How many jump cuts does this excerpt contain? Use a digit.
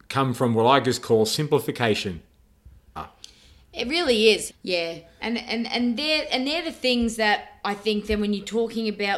2